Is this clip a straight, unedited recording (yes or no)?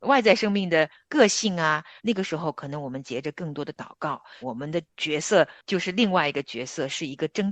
no